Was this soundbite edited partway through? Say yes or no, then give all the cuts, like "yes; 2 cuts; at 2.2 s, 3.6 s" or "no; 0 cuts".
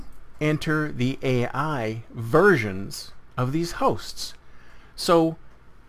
no; 0 cuts